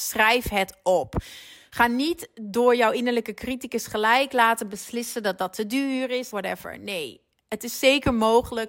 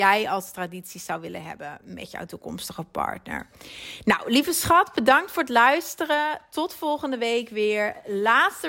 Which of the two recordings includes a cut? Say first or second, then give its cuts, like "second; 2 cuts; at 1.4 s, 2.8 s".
first; 1 cut; at 6.3 s